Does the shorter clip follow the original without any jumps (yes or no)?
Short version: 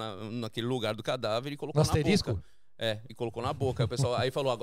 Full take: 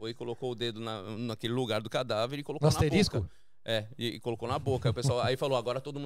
no